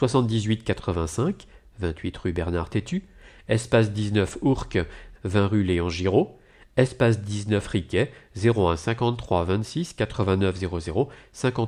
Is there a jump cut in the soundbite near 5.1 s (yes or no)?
yes